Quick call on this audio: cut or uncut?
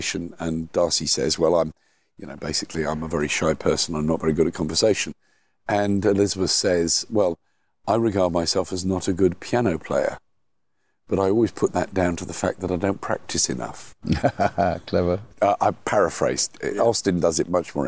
uncut